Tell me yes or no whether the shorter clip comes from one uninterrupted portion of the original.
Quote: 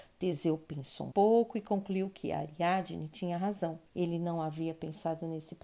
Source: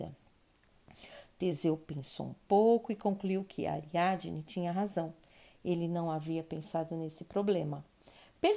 no